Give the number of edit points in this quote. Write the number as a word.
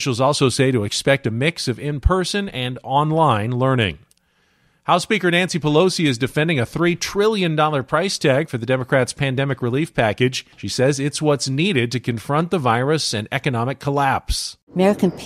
one